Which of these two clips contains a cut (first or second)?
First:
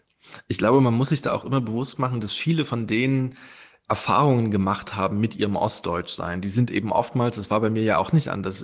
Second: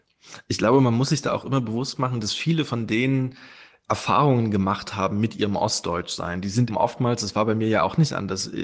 second